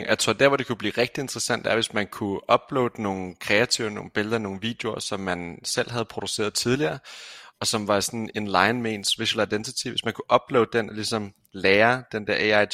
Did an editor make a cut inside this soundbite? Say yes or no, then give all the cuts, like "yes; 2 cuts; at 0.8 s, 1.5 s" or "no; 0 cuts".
no; 0 cuts